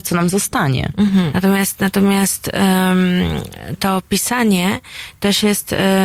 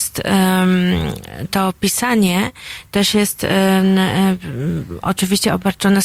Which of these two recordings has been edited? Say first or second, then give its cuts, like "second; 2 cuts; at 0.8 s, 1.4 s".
first; 1 cut; at 1.3 s